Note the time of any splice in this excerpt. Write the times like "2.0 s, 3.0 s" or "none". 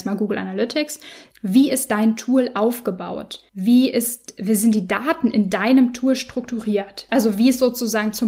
1.3 s, 3.5 s, 7.1 s

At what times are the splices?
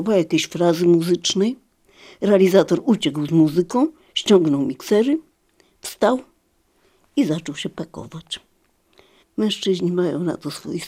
9.2 s

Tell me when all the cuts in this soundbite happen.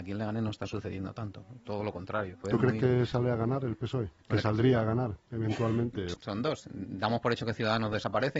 2.4 s, 4.2 s, 6.1 s

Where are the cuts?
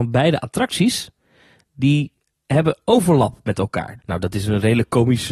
4.0 s

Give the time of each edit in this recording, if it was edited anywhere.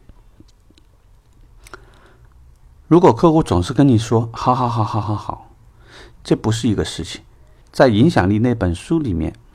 5.0 s, 6.2 s, 7.6 s

